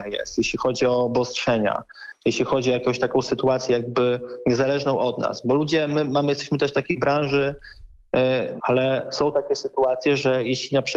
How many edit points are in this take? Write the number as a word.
one